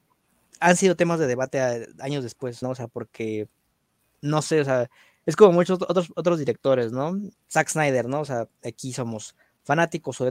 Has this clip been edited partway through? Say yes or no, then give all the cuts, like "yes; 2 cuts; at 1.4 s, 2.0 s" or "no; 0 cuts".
yes; 3 cuts; at 2.6 s, 7.3 s, 8.5 s